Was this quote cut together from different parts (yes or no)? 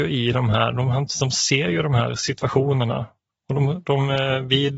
no